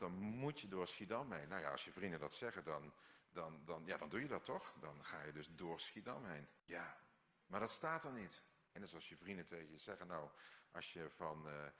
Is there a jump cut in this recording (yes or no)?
yes